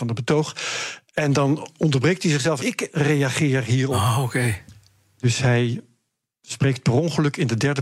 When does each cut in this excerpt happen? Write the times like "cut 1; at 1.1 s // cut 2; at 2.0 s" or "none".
cut 1; at 2.6 s